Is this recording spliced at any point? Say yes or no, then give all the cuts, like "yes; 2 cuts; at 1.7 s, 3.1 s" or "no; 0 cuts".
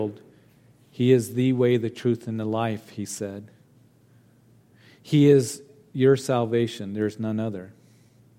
no; 0 cuts